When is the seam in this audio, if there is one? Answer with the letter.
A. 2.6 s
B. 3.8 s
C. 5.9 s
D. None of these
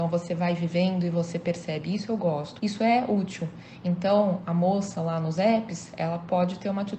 A